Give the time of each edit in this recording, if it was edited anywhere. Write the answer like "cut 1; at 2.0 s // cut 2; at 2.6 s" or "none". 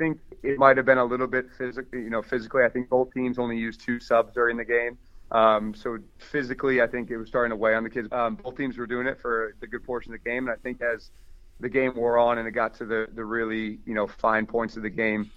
cut 1; at 8.1 s